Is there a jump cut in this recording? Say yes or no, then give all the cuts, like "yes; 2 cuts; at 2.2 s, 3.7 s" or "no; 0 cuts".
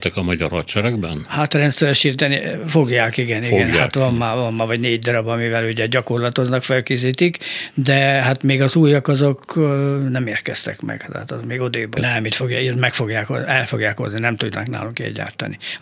yes; 1 cut; at 12.0 s